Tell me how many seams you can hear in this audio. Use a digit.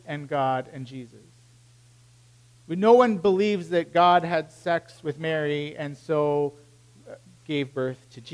0